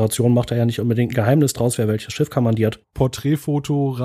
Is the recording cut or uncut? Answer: cut